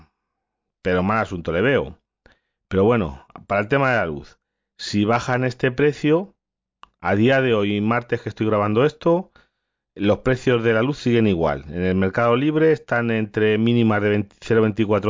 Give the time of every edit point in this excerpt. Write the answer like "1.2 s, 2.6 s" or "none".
none